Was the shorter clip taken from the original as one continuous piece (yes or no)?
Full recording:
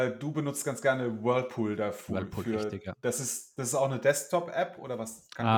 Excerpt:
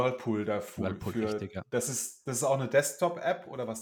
yes